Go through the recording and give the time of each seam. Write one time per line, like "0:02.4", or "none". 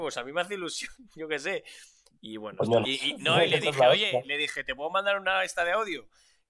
0:02.8